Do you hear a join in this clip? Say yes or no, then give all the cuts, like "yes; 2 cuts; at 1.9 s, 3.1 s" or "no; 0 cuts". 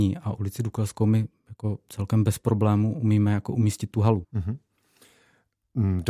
yes; 1 cut; at 4.2 s